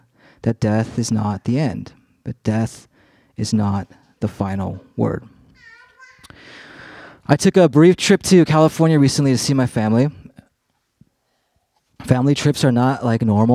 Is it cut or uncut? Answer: uncut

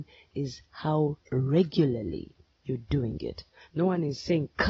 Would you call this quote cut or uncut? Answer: cut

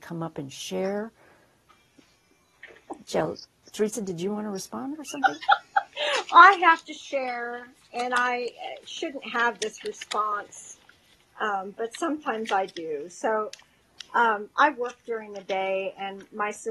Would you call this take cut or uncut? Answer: uncut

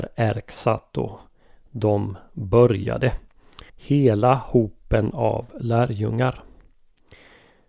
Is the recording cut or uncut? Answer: cut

